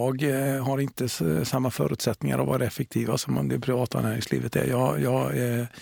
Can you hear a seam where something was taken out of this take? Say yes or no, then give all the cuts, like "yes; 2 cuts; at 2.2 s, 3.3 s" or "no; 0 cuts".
no; 0 cuts